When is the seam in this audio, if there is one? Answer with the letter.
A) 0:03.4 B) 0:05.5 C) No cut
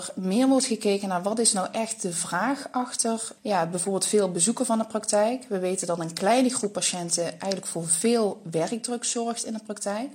A